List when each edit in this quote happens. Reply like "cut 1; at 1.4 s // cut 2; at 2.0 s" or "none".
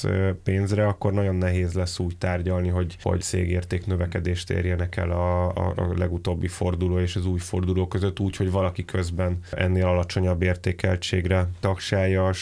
cut 1; at 3.2 s